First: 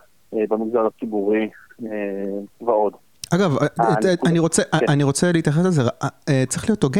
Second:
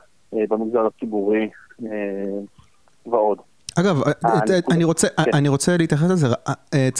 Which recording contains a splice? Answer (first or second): first